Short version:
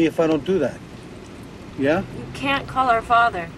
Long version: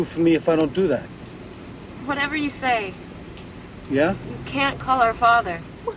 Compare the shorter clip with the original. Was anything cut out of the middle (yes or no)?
yes